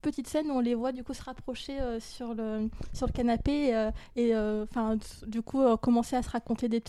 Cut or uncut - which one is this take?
uncut